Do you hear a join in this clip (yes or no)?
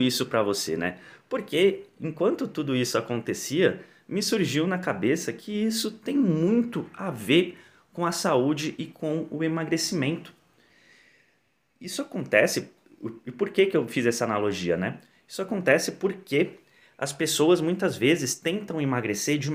no